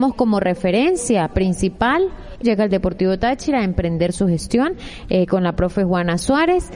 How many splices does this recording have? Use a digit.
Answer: 1